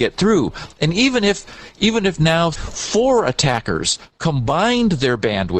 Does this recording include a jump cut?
yes; 1 cut; at 2.5 s

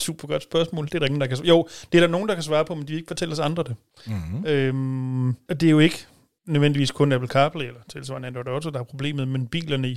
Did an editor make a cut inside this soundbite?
no; 0 cuts

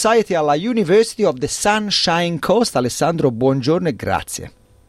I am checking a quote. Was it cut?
no; 0 cuts

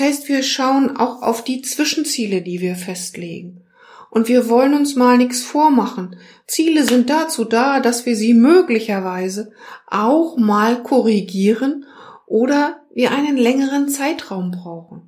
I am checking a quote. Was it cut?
no; 0 cuts

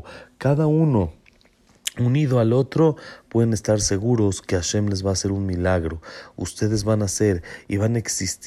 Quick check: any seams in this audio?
no; 0 cuts

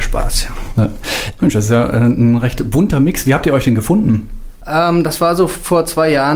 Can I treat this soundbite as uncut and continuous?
no; 1 cut; at 1.4 s

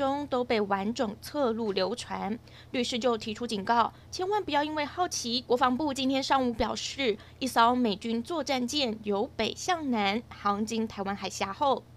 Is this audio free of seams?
no; 2 cuts; at 4.1 s, 5.5 s

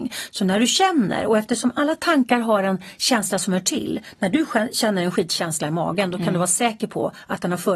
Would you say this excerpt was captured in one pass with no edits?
yes; 0 cuts

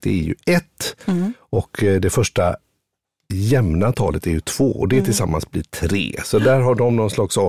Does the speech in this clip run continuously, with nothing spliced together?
yes; 0 cuts

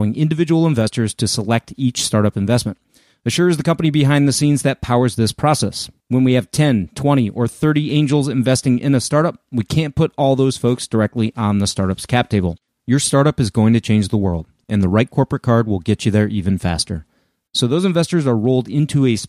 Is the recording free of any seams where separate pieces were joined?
no; 2 cuts; at 12.7 s, 17.5 s

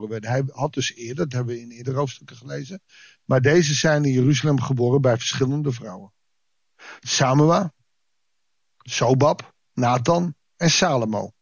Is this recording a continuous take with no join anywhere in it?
yes; 0 cuts

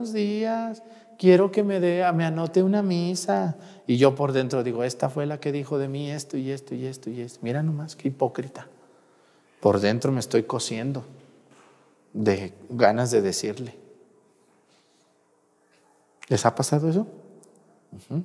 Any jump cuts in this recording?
no; 0 cuts

